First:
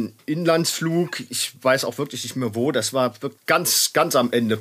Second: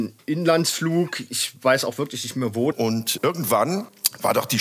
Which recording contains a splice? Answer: second; 1 cut; at 2.7 s

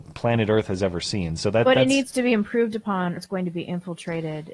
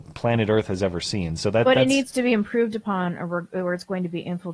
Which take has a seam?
first; 1 cut; at 3.2 s

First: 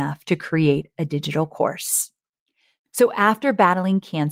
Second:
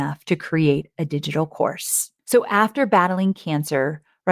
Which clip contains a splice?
second; 1 cut; at 2.2 s

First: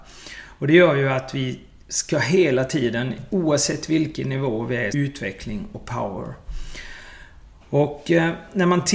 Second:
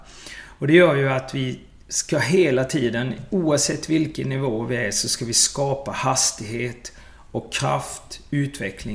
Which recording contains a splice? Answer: first; 1 cut; at 4.9 s

